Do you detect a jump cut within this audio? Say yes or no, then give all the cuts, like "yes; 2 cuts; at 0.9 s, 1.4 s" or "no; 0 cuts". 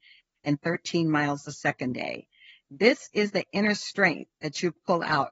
no; 0 cuts